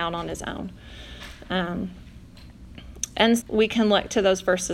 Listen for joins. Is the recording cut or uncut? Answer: cut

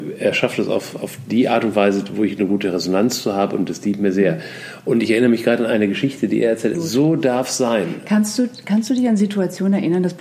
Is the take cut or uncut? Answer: cut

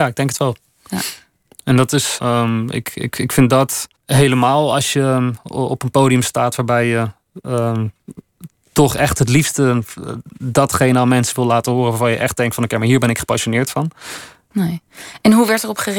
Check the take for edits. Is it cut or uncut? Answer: cut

